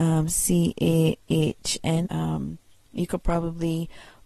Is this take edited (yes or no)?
yes